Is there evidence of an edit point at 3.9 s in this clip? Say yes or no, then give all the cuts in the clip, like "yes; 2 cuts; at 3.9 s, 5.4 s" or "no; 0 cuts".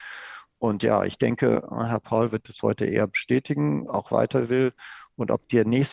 yes; 1 cut; at 3.9 s